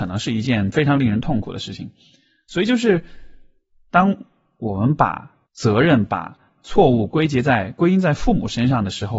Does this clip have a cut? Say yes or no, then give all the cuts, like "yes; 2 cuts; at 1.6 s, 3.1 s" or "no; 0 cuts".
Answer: yes; 1 cut; at 5.4 s